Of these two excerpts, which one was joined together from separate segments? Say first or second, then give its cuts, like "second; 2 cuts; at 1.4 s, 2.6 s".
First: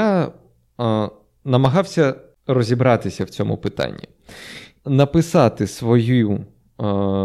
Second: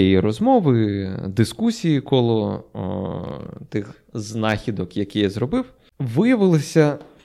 first; 1 cut; at 4.8 s